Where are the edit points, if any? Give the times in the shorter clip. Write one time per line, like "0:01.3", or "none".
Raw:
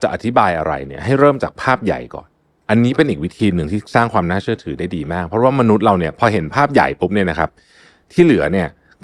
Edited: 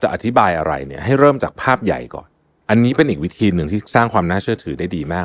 none